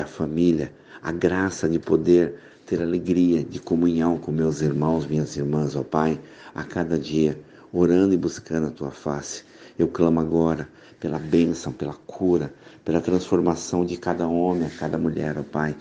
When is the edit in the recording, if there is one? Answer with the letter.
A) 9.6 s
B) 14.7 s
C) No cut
C